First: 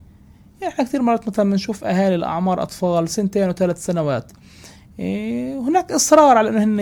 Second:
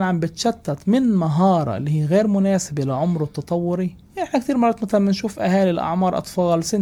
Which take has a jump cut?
second; 1 cut; at 4.0 s

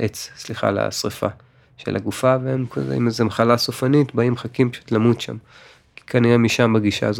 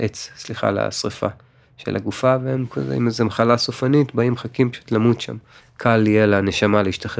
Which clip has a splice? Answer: second; 1 cut; at 5.6 s

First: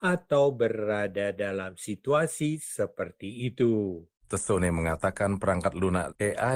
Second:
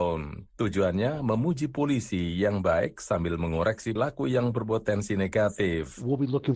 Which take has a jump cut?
second; 1 cut; at 4.0 s

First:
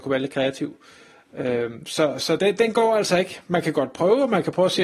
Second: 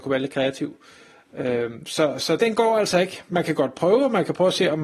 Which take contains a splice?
second; 1 cut; at 2.4 s

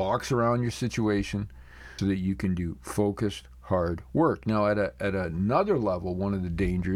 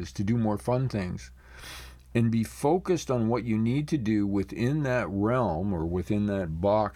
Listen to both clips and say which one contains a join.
first; 1 cut; at 2.0 s

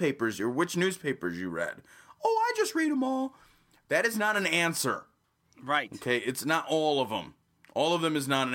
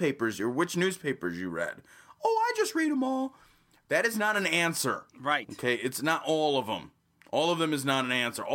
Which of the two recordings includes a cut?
second; 1 cut; at 5.1 s

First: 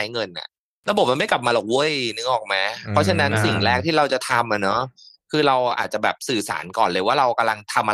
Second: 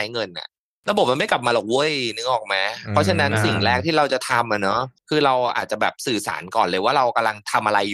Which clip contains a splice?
second; 1 cut; at 5.0 s

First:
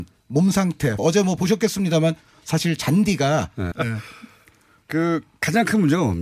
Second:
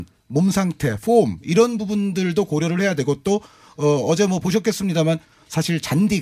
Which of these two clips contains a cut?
first; 2 cuts; at 1.0 s, 3.7 s

